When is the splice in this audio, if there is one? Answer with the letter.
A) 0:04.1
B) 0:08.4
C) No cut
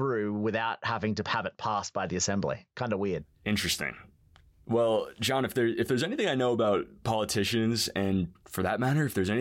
B